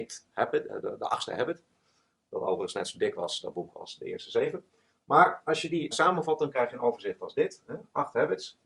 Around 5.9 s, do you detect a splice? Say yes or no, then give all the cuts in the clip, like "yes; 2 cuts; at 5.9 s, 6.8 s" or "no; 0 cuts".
yes; 1 cut; at 5.9 s